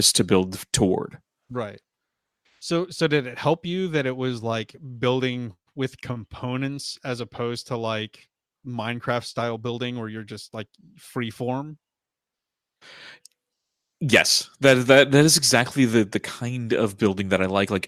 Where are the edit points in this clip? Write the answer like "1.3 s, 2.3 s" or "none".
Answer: none